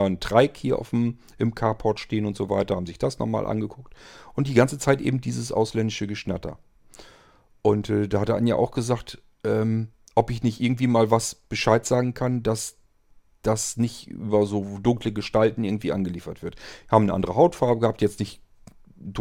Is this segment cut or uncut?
uncut